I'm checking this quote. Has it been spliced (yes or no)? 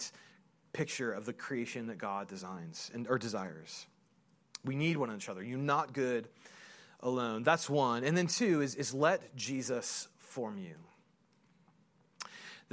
no